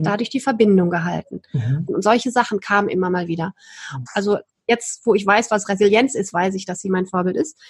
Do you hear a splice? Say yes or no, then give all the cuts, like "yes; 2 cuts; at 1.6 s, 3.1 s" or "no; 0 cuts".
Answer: yes; 2 cuts; at 1.9 s, 4.1 s